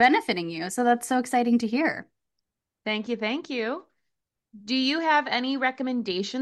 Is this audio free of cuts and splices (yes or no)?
yes